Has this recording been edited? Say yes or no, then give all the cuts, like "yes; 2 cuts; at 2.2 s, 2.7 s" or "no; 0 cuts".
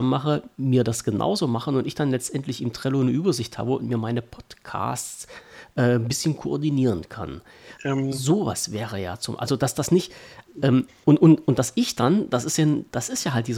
yes; 1 cut; at 7.8 s